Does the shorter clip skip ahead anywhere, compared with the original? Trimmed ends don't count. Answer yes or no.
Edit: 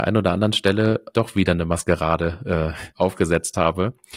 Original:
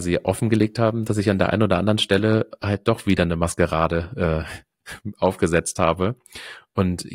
yes